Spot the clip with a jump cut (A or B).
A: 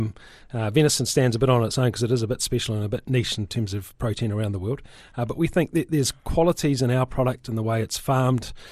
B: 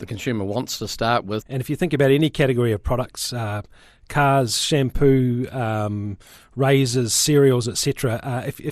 B